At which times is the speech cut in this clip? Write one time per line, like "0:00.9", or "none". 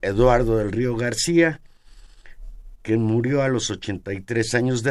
0:02.8